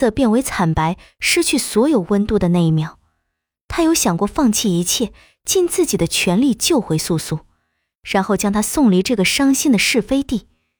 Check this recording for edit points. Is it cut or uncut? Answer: uncut